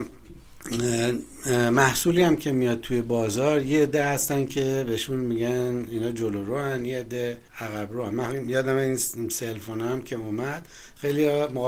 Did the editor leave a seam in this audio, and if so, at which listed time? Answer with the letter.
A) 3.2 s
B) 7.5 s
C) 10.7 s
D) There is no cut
B